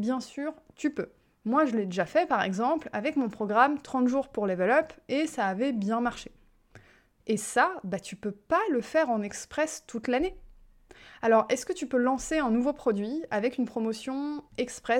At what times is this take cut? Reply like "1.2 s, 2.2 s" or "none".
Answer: 7.2 s

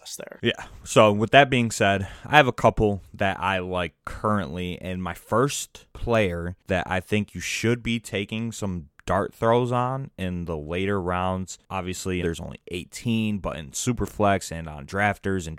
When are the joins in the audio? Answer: 12.2 s

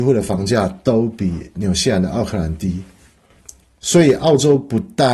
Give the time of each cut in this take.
none

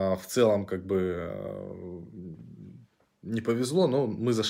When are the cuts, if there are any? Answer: none

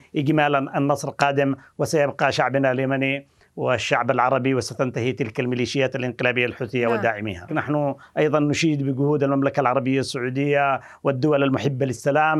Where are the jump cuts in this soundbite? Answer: 7.5 s

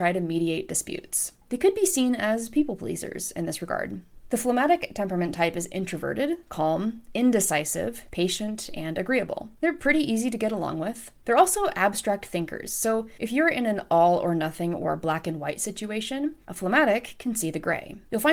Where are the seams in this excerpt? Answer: none

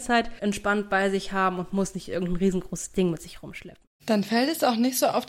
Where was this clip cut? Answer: none

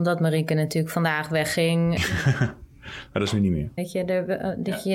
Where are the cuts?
2.0 s, 3.8 s

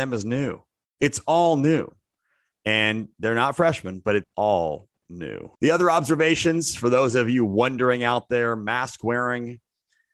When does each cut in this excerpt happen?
4.2 s, 5.6 s

